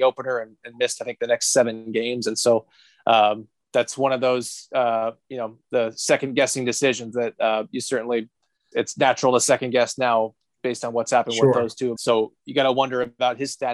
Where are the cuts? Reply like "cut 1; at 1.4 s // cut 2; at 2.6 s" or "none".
cut 1; at 8.7 s // cut 2; at 12.0 s